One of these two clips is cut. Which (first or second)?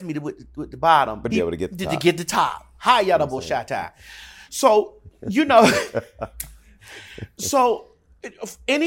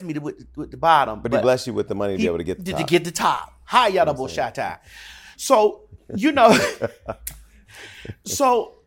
first